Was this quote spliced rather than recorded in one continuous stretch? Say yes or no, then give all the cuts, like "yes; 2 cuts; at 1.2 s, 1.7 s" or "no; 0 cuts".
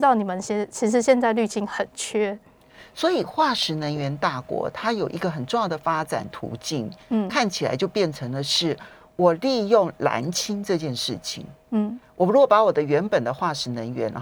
no; 0 cuts